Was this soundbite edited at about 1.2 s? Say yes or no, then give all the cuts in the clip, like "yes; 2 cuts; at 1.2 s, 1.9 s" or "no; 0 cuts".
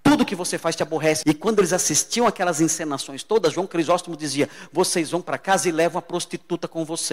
yes; 1 cut; at 1.2 s